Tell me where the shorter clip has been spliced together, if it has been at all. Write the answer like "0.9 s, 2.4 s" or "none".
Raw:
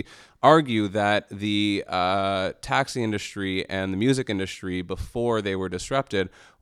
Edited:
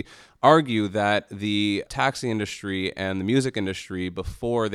1.9 s